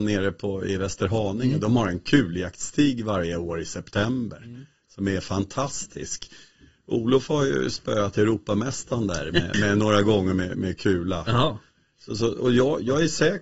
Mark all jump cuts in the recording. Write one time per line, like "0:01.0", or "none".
0:09.5